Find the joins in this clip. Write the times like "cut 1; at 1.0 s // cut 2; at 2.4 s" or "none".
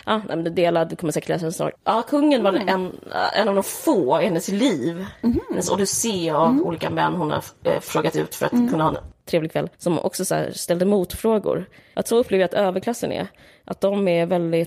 cut 1; at 1.8 s // cut 2; at 9.7 s